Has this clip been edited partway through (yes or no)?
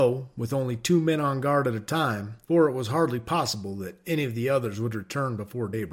no